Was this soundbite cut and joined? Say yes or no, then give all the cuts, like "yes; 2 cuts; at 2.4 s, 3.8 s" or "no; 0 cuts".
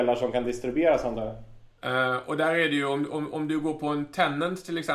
yes; 1 cut; at 1.8 s